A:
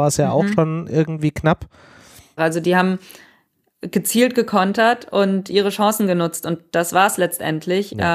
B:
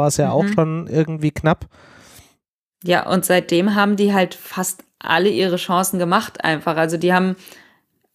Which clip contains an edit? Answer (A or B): A